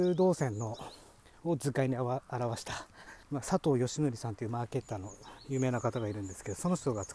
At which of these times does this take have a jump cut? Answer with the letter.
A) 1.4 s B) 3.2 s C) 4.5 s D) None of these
B